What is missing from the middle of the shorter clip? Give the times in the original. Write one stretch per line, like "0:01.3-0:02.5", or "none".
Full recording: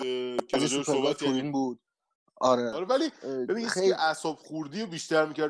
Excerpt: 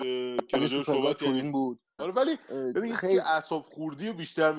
0:02.0-0:02.7